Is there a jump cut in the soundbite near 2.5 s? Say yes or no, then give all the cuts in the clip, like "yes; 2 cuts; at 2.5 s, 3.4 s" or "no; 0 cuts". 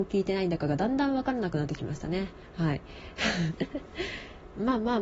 no; 0 cuts